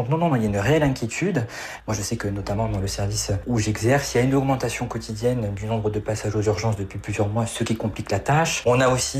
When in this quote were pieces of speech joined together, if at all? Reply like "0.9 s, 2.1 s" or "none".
none